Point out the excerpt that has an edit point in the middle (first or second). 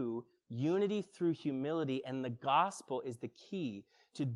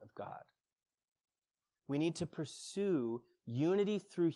second